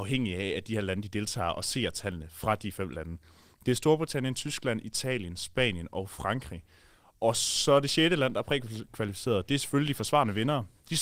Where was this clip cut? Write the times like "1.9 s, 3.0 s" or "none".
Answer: none